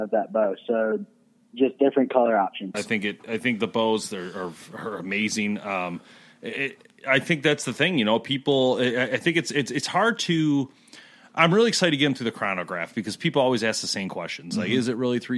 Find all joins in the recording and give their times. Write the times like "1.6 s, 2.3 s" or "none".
2.7 s